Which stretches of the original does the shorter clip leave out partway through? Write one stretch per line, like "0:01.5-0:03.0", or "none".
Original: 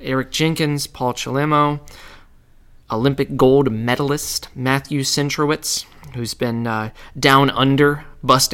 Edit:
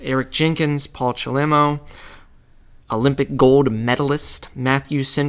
none